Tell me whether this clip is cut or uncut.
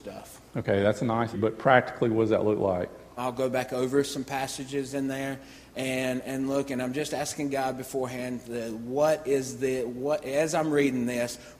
cut